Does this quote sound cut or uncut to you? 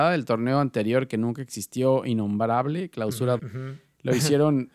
cut